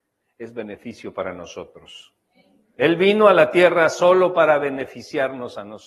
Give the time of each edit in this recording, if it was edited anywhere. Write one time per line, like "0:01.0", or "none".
none